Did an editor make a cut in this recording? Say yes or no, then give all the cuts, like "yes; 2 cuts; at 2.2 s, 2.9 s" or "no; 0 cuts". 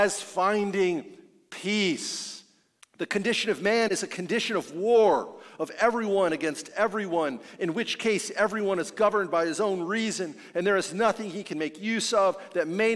yes; 1 cut; at 2.8 s